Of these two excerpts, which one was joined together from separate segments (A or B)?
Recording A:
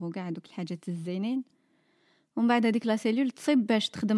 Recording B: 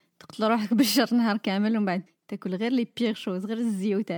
B